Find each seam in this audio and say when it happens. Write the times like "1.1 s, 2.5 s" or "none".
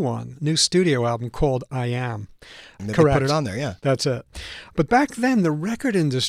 2.8 s, 4.7 s

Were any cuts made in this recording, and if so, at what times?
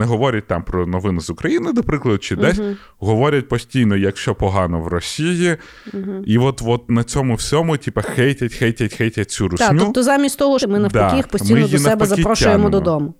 8.9 s, 10.6 s

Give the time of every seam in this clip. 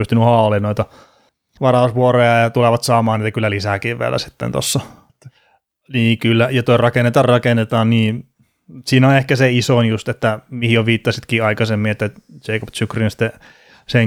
5.1 s, 7.2 s

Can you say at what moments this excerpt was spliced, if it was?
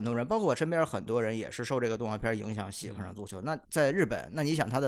3.6 s

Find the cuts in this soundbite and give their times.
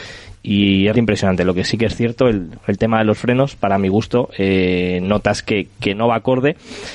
0.9 s

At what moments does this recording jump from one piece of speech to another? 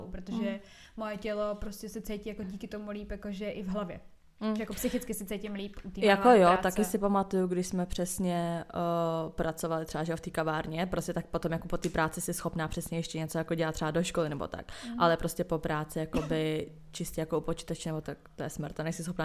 18.0 s

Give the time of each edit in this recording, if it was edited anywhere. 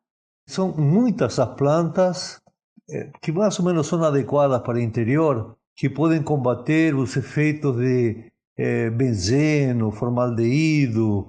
5.6 s

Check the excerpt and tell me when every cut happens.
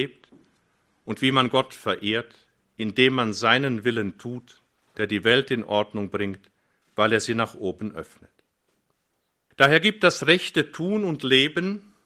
none

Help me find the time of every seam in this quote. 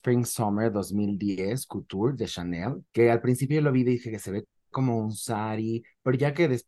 2.9 s

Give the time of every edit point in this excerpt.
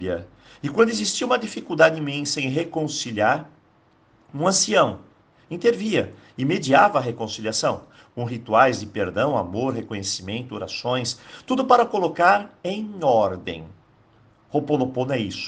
5.3 s

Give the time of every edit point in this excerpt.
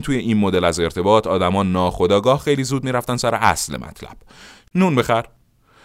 4.7 s

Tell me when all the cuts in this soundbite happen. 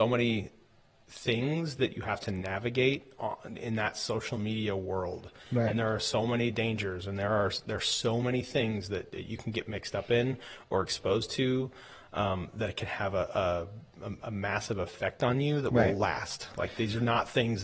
none

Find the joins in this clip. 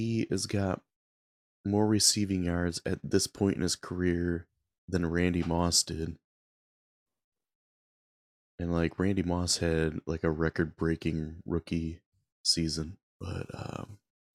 13.1 s

